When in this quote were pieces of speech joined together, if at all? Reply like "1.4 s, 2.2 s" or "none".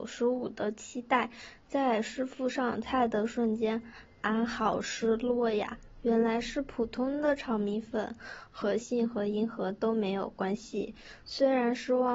8.8 s, 11.2 s